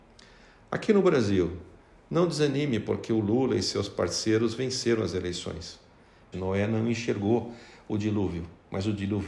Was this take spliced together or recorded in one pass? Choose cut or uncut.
cut